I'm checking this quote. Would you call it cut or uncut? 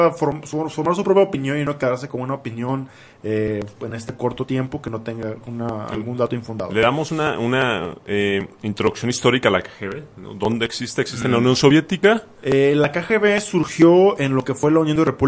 cut